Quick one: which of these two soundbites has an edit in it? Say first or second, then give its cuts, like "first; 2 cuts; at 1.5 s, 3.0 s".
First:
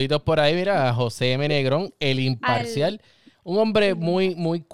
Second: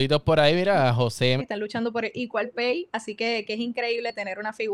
second; 1 cut; at 1.4 s